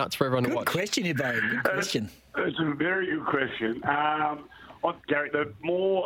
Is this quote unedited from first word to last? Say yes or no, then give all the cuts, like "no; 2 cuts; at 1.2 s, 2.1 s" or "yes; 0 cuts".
no; 1 cut; at 5.0 s